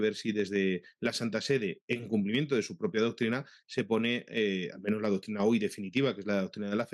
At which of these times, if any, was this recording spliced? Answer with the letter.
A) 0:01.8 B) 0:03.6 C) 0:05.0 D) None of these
D